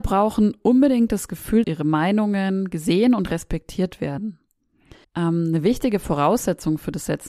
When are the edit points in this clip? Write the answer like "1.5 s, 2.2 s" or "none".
1.6 s, 5.0 s